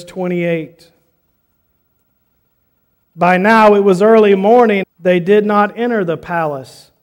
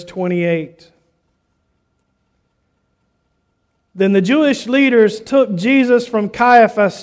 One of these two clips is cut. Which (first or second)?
first